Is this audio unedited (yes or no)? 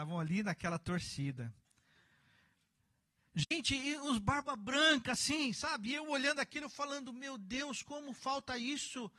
yes